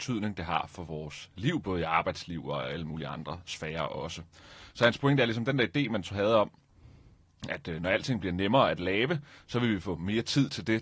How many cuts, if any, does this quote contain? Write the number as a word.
one